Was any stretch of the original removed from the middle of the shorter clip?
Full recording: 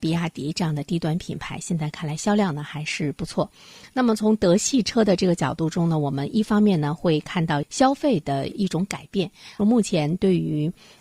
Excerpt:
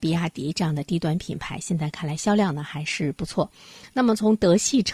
no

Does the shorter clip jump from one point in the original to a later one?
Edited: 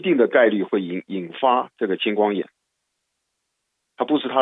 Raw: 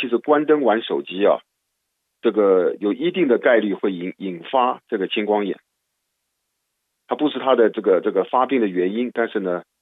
no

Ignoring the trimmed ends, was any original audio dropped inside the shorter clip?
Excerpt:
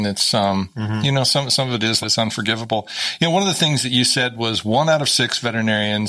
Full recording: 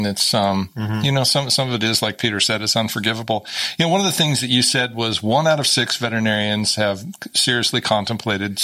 yes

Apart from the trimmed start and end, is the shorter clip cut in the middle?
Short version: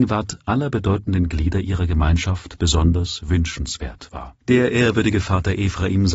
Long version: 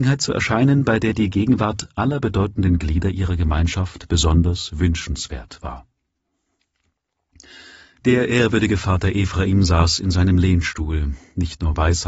yes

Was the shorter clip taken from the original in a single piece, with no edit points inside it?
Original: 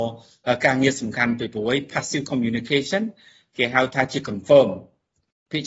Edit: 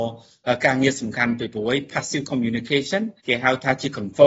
no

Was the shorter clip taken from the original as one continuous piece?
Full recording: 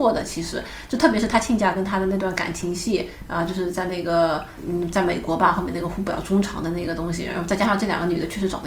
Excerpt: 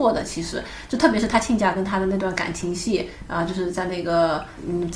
yes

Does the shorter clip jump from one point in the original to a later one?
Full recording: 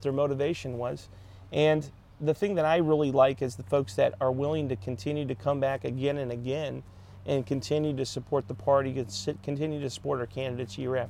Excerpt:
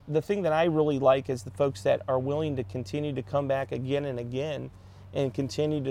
no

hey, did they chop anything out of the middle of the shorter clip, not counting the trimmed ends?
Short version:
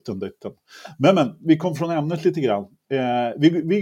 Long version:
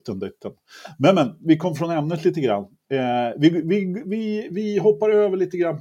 no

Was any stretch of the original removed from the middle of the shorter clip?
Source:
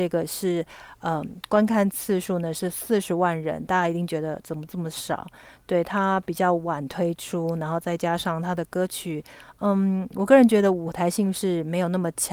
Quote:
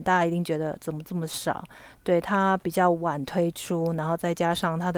no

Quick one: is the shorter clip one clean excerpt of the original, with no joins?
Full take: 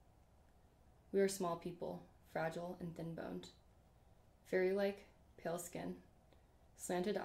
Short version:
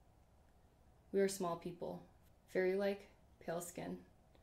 no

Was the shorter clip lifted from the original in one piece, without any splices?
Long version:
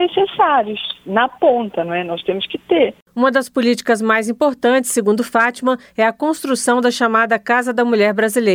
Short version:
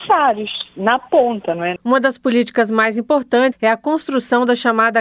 no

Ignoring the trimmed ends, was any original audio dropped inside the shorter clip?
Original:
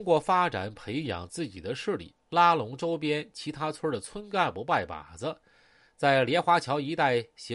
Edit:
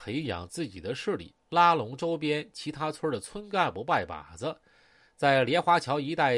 no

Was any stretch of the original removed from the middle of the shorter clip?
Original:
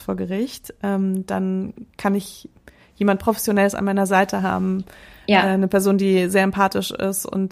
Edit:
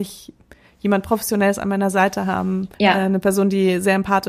yes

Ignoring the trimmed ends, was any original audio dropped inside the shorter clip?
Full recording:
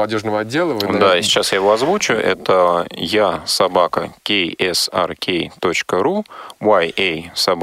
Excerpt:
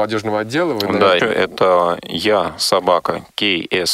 yes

